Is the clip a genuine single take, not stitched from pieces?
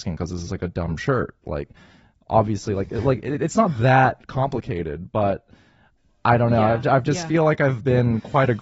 yes; 0 cuts

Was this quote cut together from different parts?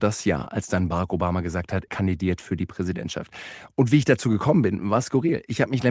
yes; 1 cut; at 1.9 s

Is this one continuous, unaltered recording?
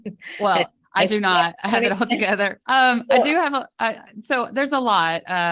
no; 1 cut; at 2.6 s

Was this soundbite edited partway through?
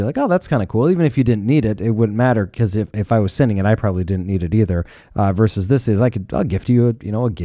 no; 0 cuts

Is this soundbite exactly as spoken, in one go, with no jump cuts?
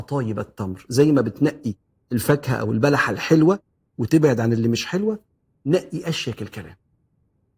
yes; 0 cuts

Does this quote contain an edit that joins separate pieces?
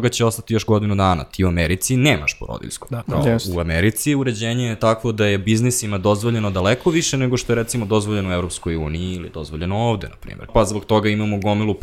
yes; 2 cuts; at 3.0 s, 10.5 s

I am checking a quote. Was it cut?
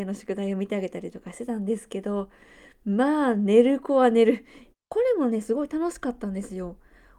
yes; 1 cut; at 4.7 s

